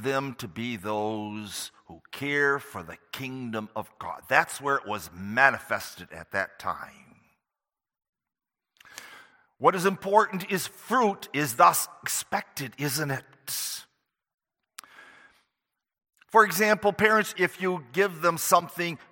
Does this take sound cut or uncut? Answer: cut